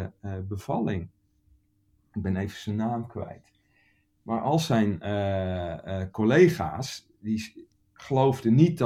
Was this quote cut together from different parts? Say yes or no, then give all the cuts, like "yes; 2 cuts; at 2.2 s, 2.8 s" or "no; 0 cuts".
no; 0 cuts